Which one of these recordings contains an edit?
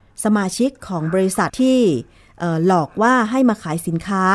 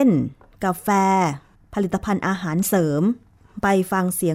first; 1 cut; at 1.5 s

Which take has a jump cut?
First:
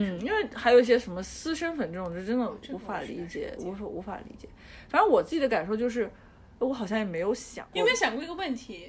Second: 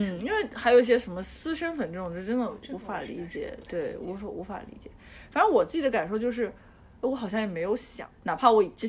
first; 2 cuts; at 3.6 s, 7.7 s

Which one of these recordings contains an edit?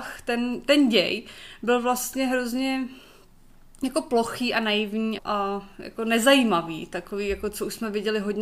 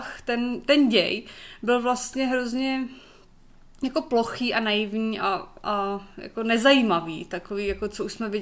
first; 1 cut; at 5.2 s

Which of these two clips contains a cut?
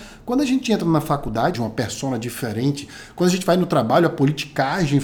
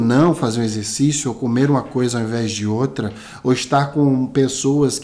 first; 1 cut; at 1.5 s

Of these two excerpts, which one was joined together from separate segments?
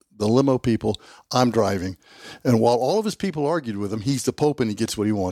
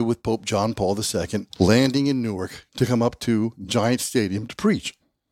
second; 1 cut; at 1.5 s

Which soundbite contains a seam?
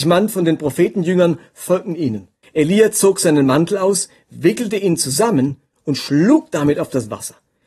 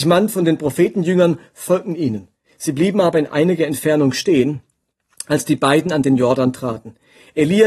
first; 1 cut; at 2.4 s

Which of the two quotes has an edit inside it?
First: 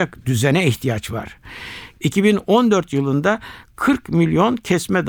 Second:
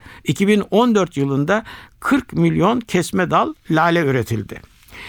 first; 1 cut; at 2.0 s

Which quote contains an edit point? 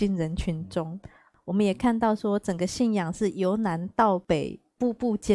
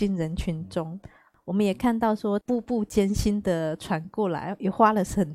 second; 1 cut; at 2.4 s

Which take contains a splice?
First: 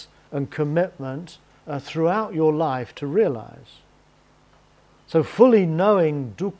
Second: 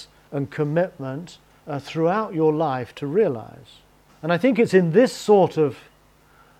second; 1 cut; at 4.1 s

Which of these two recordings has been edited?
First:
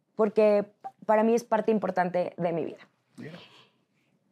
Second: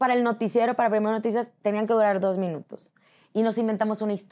second; 1 cut; at 3.2 s

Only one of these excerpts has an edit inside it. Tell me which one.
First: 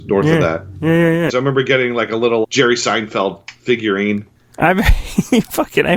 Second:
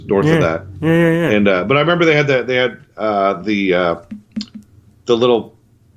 first; 2 cuts; at 1.3 s, 2.4 s

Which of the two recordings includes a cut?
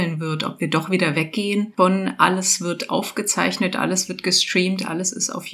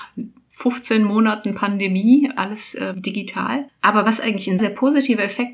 second; 1 cut; at 4.6 s

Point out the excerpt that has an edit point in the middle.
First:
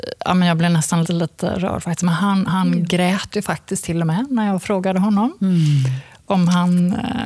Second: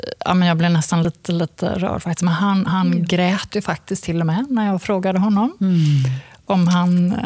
first; 1 cut; at 1.0 s

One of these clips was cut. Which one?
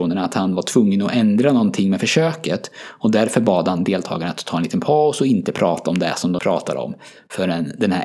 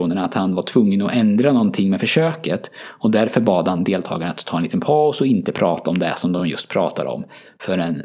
first; 1 cut; at 6.4 s

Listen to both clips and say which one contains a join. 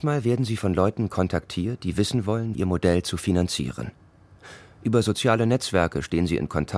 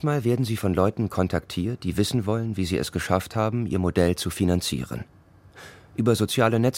first; 1 cut; at 2.5 s

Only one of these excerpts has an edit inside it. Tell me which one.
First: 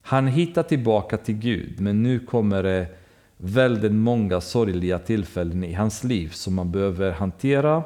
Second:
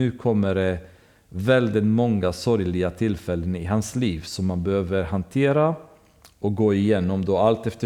first; 1 cut; at 1.8 s

